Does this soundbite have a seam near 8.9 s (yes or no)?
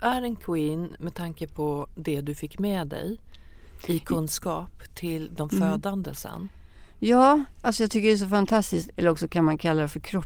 yes